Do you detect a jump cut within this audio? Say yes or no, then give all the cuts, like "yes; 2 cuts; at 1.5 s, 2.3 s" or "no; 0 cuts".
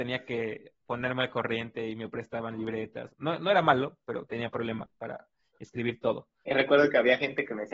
yes; 2 cuts; at 3.1 s, 6.4 s